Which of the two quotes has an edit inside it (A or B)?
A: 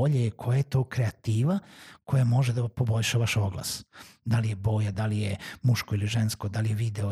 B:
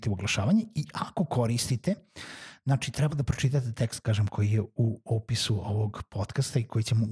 A